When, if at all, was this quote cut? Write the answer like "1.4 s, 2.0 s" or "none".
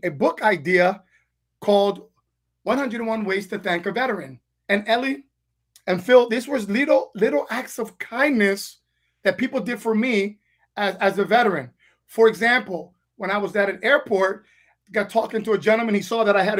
none